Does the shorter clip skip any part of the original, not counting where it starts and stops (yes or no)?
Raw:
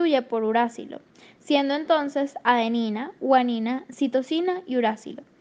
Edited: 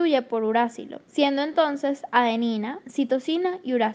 yes